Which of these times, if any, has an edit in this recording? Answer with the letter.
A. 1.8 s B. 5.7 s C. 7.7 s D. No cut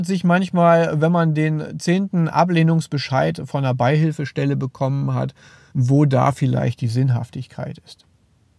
B